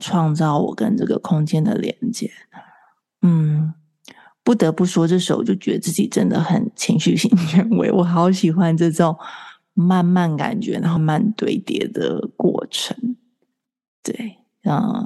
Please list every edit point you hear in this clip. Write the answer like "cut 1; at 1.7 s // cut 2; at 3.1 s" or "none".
cut 1; at 11.0 s